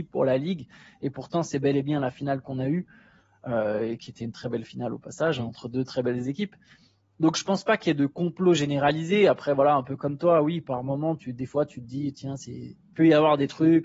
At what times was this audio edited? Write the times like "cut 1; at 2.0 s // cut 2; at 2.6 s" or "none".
none